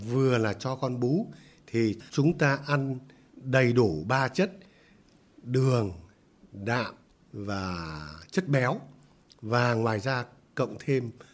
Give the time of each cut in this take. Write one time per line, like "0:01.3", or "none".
none